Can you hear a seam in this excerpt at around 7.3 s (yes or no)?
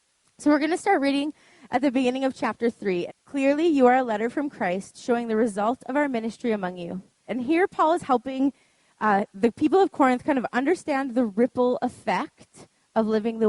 yes